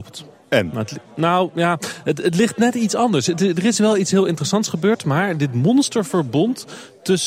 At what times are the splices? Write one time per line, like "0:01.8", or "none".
none